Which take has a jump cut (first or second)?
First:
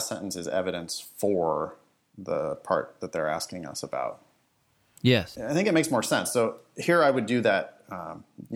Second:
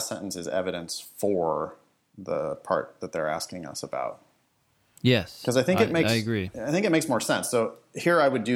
first